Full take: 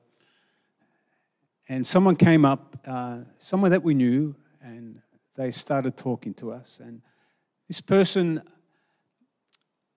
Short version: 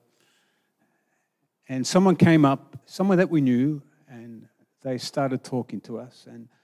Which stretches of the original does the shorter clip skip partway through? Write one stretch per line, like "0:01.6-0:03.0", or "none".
0:02.8-0:03.3